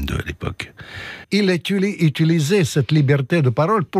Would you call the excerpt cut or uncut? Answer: cut